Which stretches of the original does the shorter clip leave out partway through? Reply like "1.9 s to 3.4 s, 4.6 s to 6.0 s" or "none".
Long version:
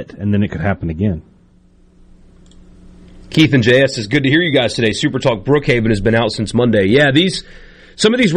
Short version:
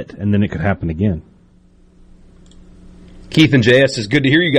none